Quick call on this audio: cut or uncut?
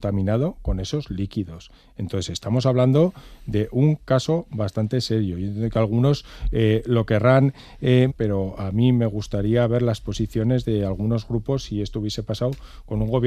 cut